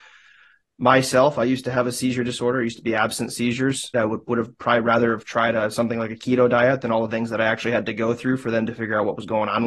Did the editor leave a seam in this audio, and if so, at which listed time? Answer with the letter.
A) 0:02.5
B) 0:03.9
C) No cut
B